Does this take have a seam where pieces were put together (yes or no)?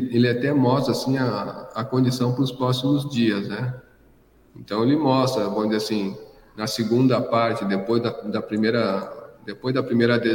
no